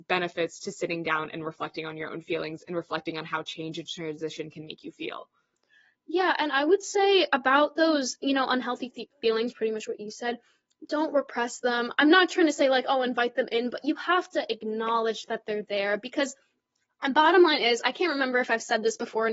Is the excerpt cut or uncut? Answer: uncut